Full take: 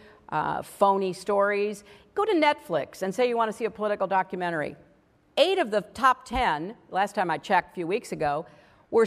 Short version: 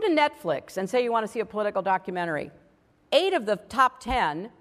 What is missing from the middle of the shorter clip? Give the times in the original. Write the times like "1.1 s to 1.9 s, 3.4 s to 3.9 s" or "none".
none

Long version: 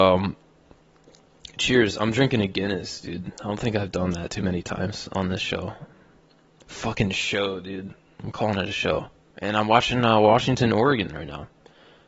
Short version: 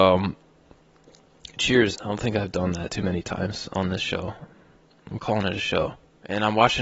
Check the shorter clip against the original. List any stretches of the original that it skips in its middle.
1.9 s to 3.3 s, 6.4 s to 8.1 s

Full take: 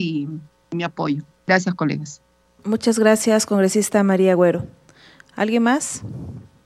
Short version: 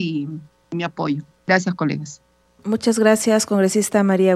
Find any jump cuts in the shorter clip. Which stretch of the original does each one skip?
none

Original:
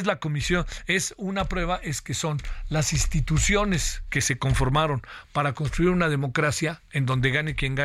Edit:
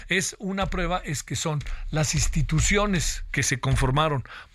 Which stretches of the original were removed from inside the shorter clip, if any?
none

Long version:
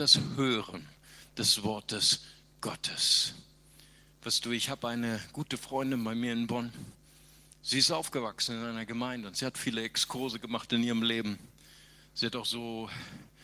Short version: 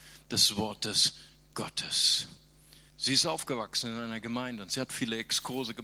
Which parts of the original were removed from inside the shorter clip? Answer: 3.9 s to 7.5 s

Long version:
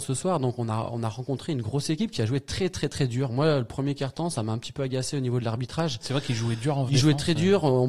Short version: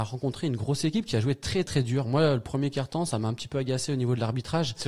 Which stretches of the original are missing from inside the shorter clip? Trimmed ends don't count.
2.7 s to 2.9 s

